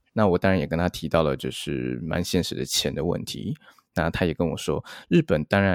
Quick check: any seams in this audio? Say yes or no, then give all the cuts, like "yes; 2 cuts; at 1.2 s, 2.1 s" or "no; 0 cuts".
no; 0 cuts